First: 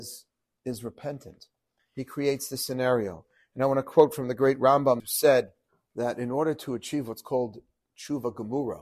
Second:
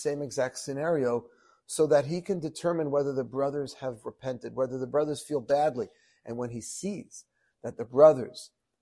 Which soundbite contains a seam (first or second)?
first